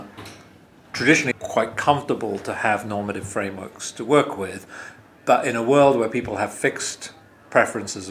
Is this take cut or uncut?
cut